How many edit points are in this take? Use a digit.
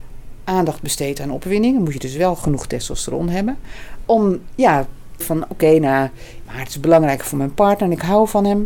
3